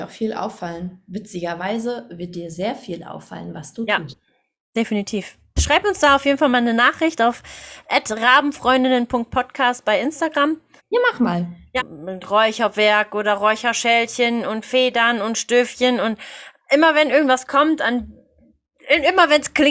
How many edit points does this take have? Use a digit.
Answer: 2